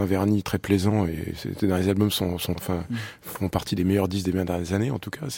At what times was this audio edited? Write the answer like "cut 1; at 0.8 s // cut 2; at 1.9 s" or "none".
cut 1; at 2.6 s

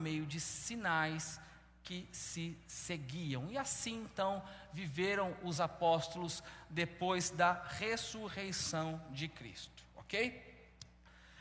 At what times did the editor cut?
none

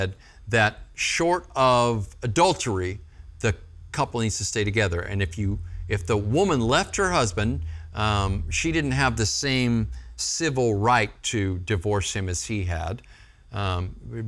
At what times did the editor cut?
none

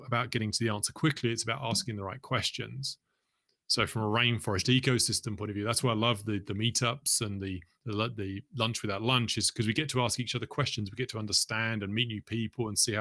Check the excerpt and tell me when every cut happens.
none

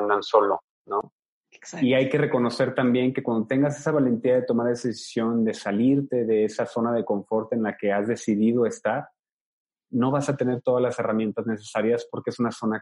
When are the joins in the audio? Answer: none

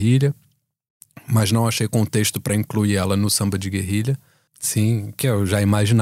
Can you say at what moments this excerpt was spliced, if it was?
cut 1; at 4.5 s

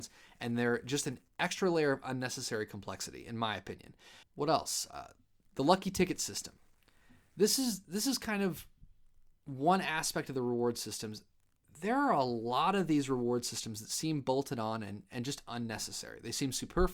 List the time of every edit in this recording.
cut 1; at 4.2 s

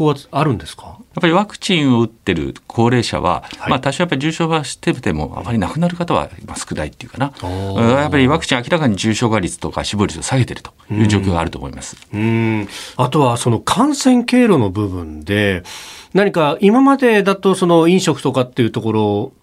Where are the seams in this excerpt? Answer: none

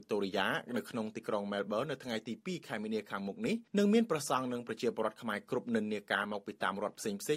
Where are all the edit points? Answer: cut 1; at 3.7 s

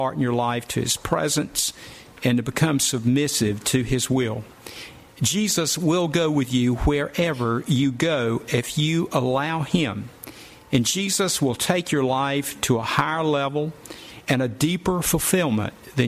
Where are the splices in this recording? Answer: cut 1; at 5.1 s

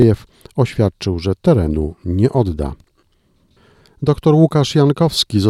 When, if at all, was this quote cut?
none

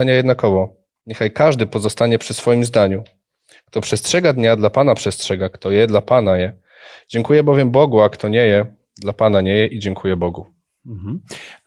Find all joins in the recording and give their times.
none

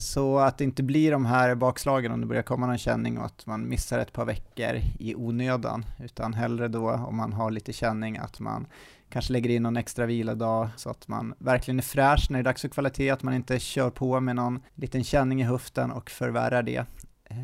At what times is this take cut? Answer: cut 1; at 10.8 s // cut 2; at 14.7 s

